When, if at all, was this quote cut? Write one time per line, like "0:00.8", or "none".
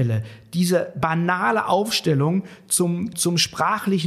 0:03.1